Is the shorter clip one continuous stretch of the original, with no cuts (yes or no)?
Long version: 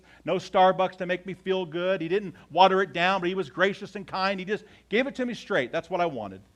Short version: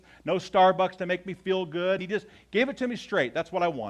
no